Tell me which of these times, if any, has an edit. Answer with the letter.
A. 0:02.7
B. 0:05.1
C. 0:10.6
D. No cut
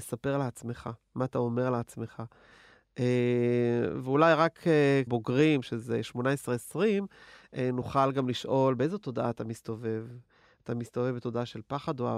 B